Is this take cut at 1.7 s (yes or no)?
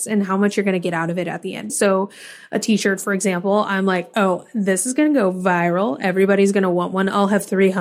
yes